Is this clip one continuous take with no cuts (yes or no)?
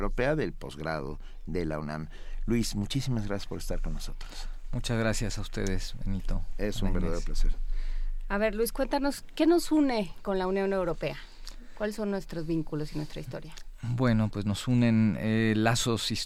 yes